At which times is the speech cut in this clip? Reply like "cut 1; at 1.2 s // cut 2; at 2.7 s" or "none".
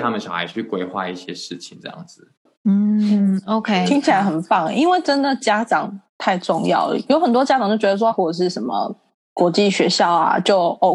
cut 1; at 7.1 s // cut 2; at 8.1 s